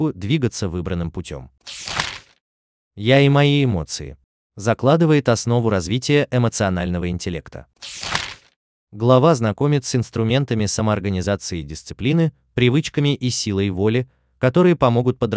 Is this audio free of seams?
no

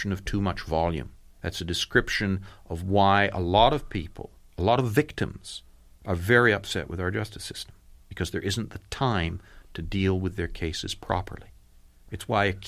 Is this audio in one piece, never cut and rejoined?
yes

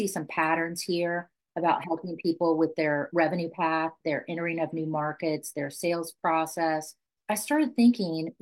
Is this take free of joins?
yes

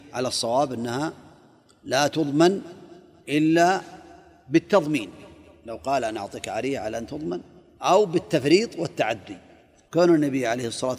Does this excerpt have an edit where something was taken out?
no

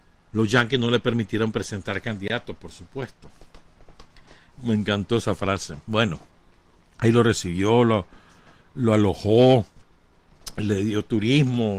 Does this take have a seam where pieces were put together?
yes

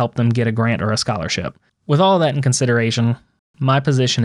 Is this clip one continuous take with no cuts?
no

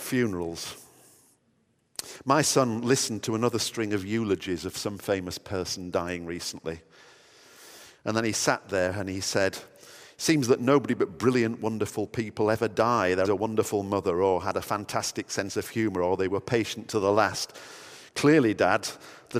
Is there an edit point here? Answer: yes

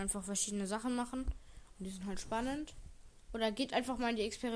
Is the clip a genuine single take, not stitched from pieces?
yes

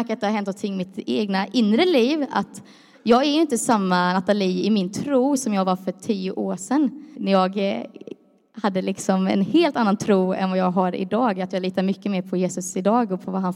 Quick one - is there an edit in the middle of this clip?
yes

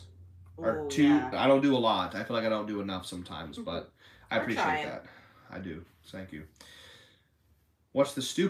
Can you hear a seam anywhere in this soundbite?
yes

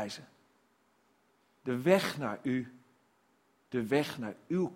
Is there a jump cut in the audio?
no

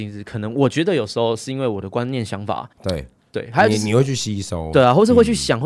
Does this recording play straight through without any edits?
no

